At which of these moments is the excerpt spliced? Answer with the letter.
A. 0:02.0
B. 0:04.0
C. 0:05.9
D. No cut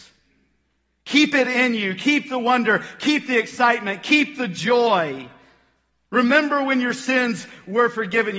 D